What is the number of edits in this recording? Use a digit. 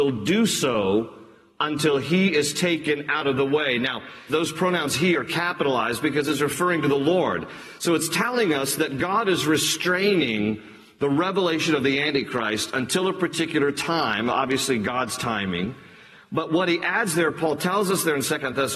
1